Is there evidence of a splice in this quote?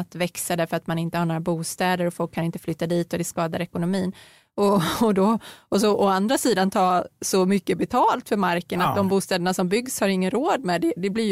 no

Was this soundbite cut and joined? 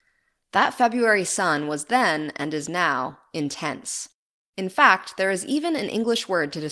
no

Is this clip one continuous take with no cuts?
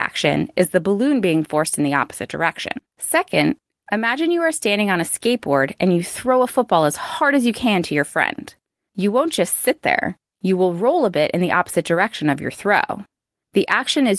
no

